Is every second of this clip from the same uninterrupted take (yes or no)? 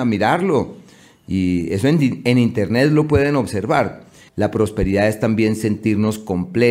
no